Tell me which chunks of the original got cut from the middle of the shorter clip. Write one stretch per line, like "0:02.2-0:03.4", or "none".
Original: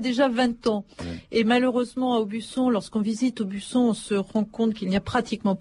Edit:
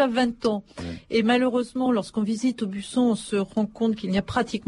0:02.1-0:02.6

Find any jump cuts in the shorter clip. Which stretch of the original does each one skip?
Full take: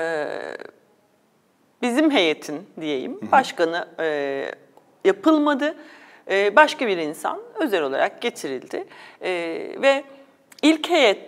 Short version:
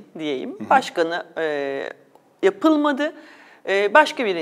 none

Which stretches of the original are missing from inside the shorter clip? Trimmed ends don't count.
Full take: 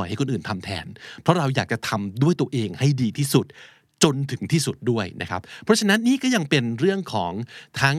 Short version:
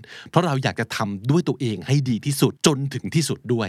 0:03.5-0:03.9

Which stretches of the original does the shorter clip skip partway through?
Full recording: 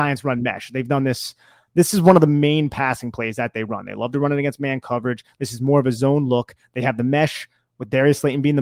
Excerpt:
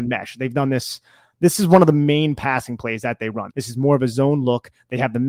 0:03.8-0:05.3

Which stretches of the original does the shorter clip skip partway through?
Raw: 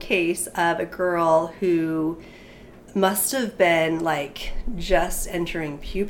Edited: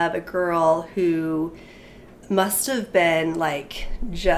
none

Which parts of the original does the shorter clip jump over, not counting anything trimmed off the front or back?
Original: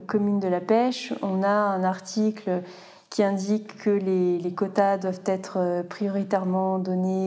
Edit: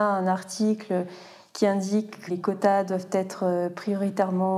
0:03.8-0:04.4

